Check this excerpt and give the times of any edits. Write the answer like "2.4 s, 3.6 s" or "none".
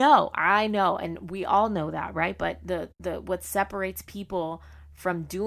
none